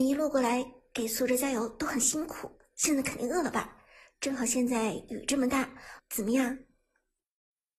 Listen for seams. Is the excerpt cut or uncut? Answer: cut